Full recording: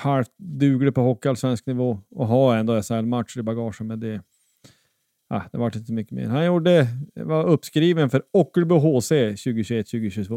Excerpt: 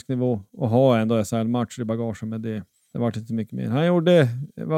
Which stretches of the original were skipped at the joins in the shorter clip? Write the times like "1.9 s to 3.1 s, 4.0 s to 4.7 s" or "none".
4.5 s to 5.5 s